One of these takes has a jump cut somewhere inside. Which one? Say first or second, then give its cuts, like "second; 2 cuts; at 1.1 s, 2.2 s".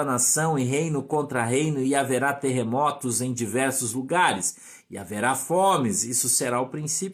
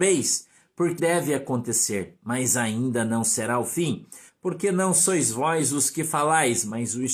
second; 2 cuts; at 1.0 s, 4.3 s